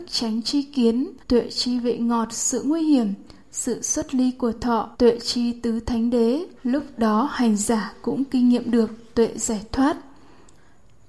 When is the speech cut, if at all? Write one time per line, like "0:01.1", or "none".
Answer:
0:01.2
0:04.9
0:06.6